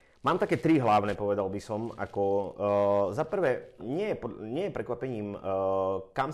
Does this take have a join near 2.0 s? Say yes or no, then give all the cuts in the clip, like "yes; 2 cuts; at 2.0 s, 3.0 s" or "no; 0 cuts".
no; 1 cut; at 3.8 s